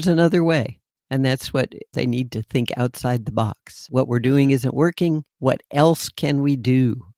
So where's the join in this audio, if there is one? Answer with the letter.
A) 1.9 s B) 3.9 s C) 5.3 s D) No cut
A